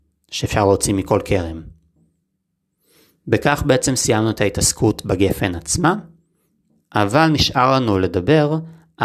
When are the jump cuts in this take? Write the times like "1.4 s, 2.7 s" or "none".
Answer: none